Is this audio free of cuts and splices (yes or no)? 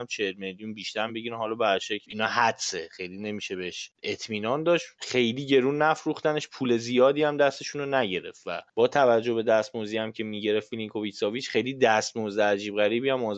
no